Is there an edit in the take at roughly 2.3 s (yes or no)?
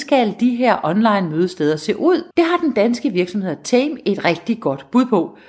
yes